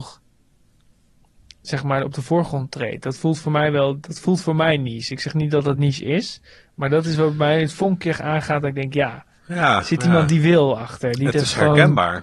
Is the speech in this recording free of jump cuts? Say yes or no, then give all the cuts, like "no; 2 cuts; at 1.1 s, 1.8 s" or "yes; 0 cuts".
yes; 0 cuts